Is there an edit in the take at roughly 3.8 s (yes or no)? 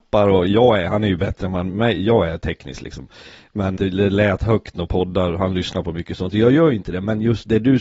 yes